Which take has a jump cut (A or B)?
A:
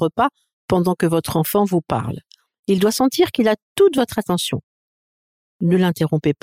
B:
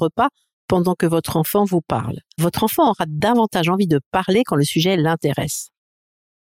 B